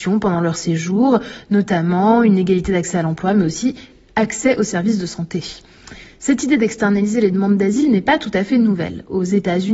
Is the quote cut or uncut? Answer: uncut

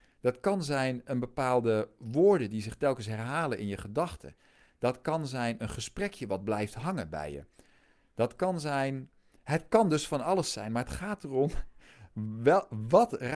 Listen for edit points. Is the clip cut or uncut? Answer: uncut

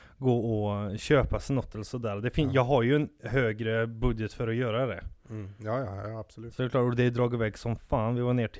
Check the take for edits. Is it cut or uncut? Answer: uncut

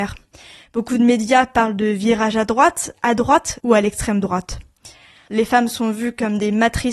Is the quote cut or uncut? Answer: cut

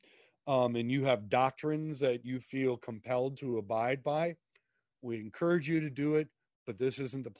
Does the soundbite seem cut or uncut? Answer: uncut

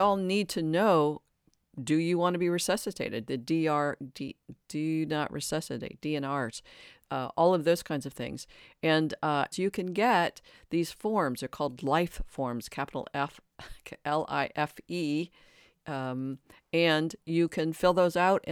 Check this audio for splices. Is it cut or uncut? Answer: cut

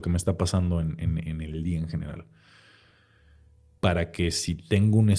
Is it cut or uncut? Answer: cut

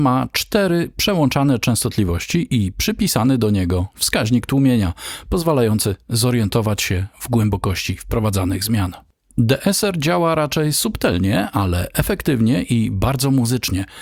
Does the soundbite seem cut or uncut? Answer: uncut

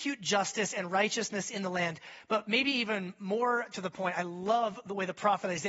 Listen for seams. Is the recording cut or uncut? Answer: uncut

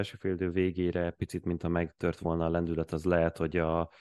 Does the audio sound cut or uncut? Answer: uncut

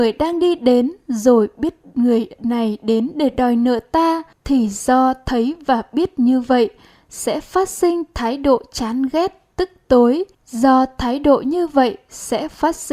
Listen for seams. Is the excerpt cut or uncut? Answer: cut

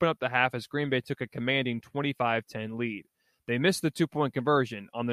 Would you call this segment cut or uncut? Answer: uncut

